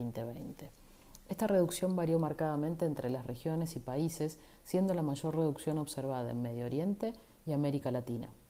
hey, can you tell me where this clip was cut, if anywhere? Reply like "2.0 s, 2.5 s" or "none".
none